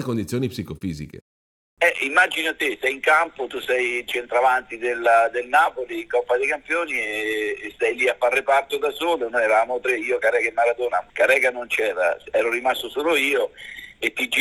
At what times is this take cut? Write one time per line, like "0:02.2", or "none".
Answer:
0:11.1